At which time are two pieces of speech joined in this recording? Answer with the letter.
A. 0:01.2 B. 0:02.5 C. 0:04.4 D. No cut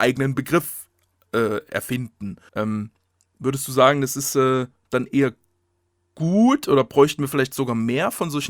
B